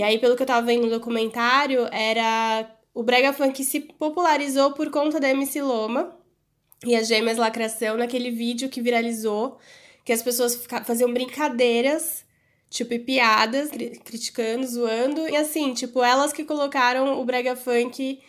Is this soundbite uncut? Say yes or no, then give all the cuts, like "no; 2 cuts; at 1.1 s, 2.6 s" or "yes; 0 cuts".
no; 2 cuts; at 13.7 s, 15.3 s